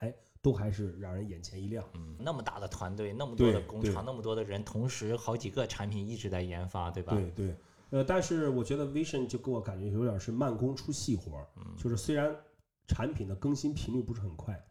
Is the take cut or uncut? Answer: cut